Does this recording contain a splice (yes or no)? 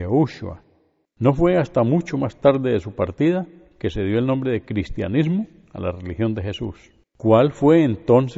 yes